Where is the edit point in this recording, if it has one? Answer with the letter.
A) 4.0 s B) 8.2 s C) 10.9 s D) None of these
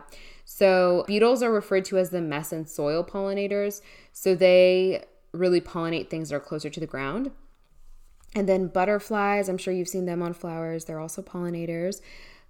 D